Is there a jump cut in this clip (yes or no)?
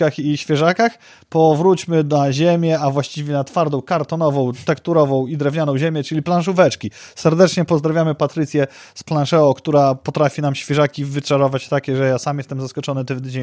no